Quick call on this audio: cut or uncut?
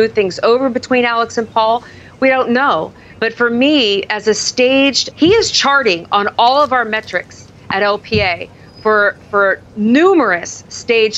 cut